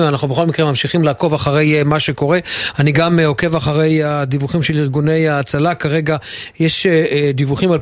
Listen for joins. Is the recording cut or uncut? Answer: uncut